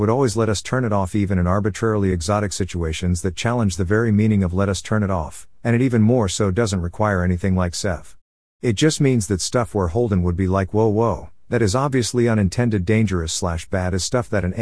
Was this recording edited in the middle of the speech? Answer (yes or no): no